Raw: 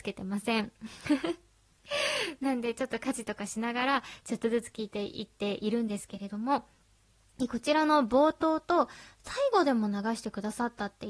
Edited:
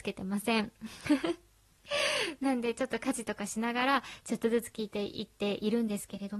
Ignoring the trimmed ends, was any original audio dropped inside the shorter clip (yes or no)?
no